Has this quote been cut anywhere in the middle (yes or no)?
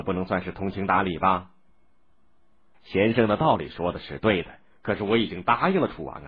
yes